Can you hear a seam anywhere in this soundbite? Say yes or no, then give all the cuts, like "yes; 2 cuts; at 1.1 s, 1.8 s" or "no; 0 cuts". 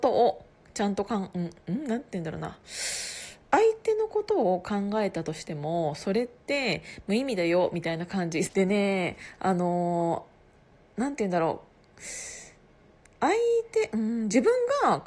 yes; 1 cut; at 8.4 s